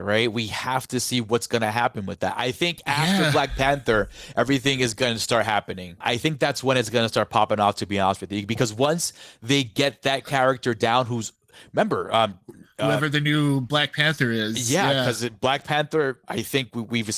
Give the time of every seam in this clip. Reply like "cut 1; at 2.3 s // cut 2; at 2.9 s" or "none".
none

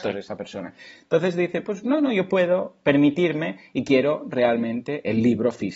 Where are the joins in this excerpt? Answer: none

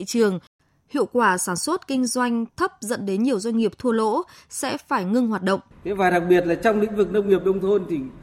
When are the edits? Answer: cut 1; at 5.7 s

